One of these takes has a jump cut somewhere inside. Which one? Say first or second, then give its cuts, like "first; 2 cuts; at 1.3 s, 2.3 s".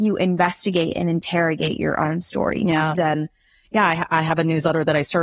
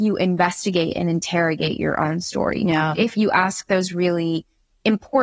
first; 1 cut; at 3.0 s